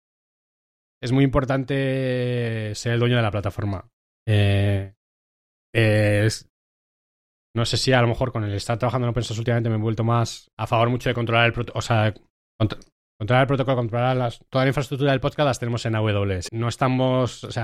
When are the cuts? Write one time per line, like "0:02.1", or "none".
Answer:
0:14.5
0:16.5